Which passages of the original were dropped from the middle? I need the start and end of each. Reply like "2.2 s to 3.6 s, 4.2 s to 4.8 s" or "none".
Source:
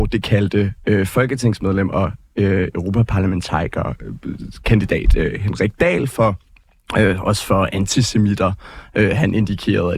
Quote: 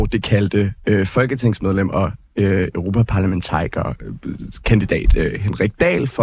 none